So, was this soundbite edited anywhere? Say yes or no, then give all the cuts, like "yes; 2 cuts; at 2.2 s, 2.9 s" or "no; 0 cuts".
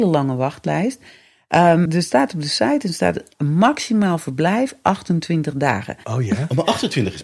yes; 2 cuts; at 1.9 s, 6.0 s